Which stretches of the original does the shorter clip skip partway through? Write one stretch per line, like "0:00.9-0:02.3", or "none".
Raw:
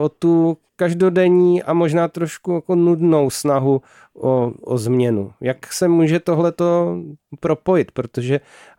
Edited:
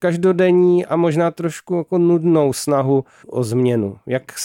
0:04.0-0:04.6